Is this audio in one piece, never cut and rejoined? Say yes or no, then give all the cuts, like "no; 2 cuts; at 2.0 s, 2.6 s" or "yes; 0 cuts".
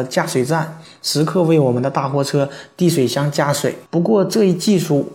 no; 1 cut; at 3.9 s